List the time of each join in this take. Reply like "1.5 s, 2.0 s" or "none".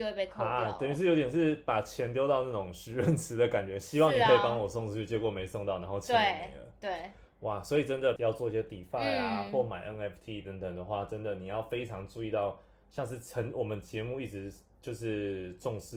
8.2 s